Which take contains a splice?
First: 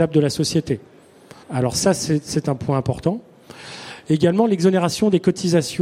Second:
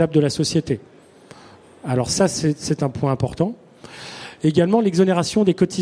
first; 1 cut; at 1.4 s

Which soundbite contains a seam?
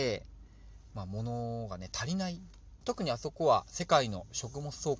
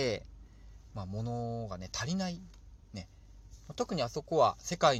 first; 1 cut; at 2.8 s

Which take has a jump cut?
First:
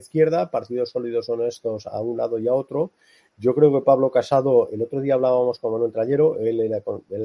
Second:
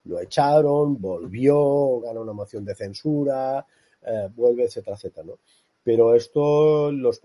second; 1 cut; at 2.0 s

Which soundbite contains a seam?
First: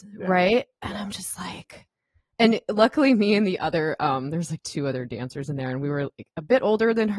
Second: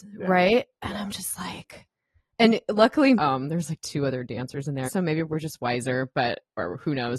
second; 2 cuts; at 3.2 s, 4.9 s

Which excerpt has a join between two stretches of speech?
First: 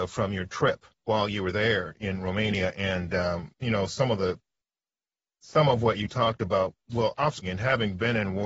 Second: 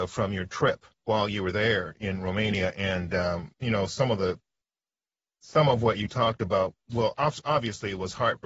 first; 1 cut; at 7.4 s

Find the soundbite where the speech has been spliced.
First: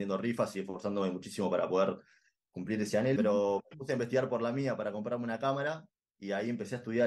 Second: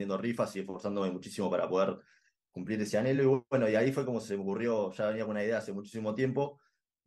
first; 1 cut; at 3.2 s

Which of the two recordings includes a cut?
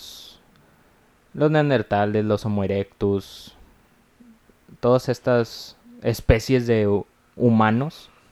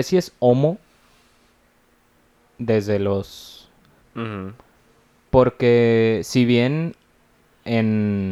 second; 1 cut; at 4.0 s

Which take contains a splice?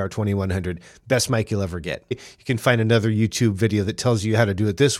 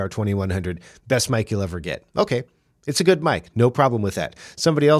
first; 1 cut; at 2.1 s

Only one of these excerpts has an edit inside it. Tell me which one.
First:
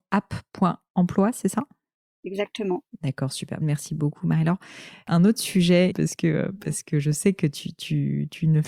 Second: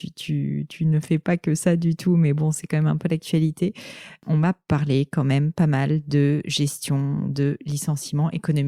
first; 2 cuts; at 3.6 s, 5.9 s

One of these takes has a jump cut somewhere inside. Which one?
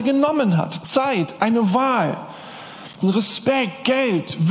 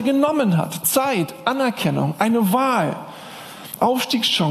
first; 2 cuts; at 1.4 s, 3.0 s

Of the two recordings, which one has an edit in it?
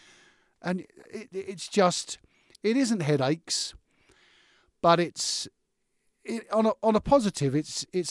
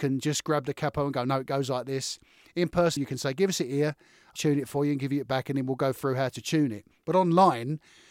second; 2 cuts; at 3.0 s, 4.4 s

